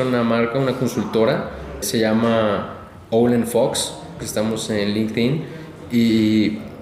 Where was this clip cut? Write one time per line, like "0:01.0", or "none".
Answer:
0:01.8
0:04.2